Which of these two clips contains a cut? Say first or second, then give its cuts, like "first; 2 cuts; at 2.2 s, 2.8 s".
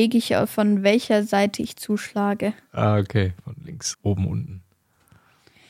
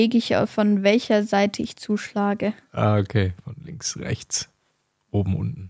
first; 1 cut; at 3.9 s